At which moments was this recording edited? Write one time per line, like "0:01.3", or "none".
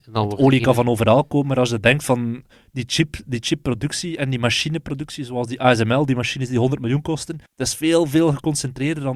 0:07.5